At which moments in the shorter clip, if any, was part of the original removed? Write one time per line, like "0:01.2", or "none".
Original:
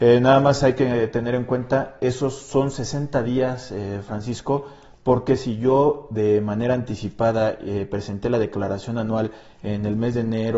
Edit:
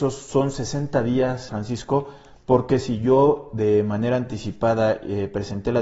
0:01.5